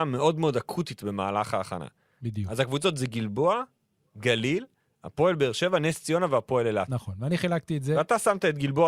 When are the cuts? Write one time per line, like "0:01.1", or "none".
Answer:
none